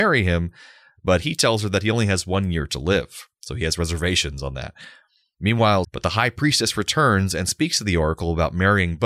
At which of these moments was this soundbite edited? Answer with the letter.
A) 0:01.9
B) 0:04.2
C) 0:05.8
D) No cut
C